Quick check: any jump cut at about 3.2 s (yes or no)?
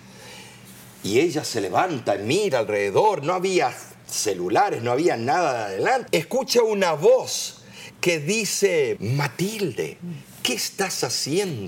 no